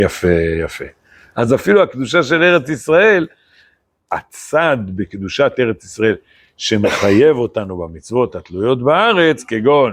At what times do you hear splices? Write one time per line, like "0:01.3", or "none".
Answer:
0:01.3
0:04.0